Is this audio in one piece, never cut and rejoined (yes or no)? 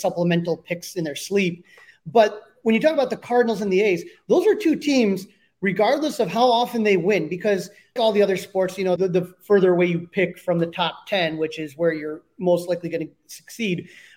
no